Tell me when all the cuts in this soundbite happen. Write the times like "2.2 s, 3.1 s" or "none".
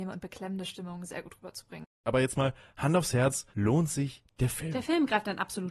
2.0 s, 3.5 s